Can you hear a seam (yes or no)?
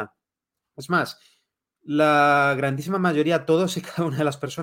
no